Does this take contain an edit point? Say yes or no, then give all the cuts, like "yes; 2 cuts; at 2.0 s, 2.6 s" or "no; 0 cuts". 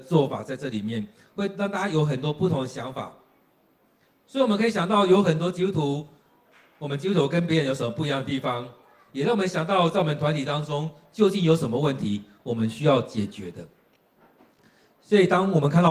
no; 0 cuts